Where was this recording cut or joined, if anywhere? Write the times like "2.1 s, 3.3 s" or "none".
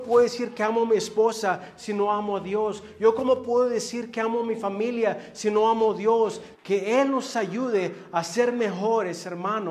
6.5 s

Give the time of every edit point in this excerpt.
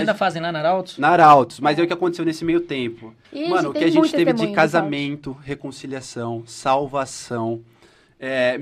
3.2 s

